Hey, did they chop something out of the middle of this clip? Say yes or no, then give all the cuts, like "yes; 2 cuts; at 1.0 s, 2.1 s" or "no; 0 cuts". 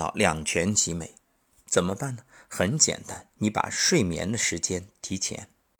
yes; 1 cut; at 3.3 s